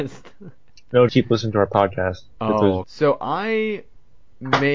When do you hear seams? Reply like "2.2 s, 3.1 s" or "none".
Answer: 1.1 s, 2.8 s